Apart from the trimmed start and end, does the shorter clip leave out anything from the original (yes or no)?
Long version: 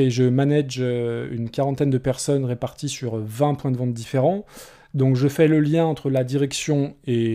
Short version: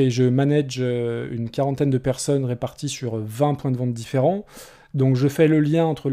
no